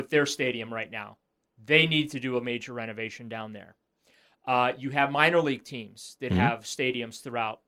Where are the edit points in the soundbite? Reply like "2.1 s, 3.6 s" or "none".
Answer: none